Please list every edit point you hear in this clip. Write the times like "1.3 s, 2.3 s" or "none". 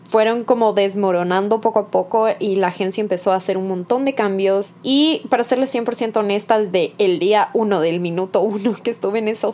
4.7 s